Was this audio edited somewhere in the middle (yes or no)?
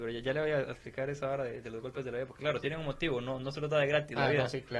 no